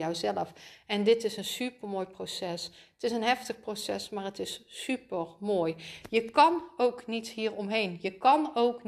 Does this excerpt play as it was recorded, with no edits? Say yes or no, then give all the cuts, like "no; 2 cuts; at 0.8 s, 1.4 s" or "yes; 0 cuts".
yes; 0 cuts